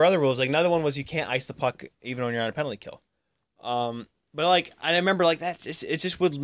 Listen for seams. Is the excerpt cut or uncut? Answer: uncut